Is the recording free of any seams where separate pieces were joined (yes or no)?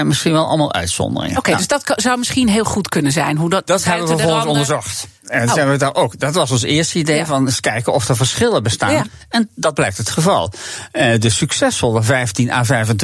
no